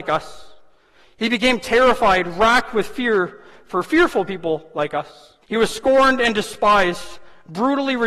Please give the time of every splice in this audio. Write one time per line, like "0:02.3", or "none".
0:05.4